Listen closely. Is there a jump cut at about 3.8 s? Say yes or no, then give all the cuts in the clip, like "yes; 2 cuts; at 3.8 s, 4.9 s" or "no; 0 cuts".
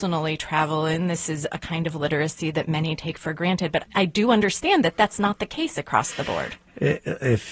yes; 1 cut; at 3.8 s